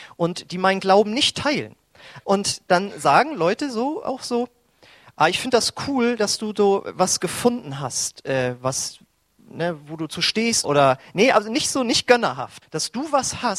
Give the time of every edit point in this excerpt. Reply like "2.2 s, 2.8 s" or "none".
2.2 s, 10.6 s, 12.6 s